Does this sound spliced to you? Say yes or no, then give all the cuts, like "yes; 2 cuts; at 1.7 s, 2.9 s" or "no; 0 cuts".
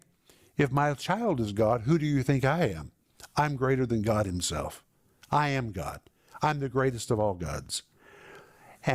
no; 0 cuts